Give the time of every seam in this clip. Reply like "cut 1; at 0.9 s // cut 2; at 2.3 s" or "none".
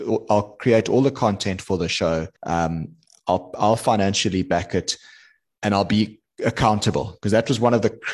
cut 1; at 2.4 s